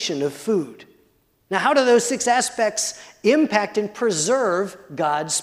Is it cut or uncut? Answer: cut